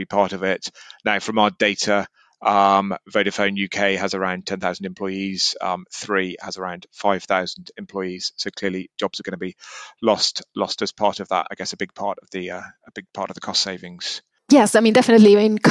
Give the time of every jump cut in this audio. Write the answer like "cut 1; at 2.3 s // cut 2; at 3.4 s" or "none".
cut 1; at 11.5 s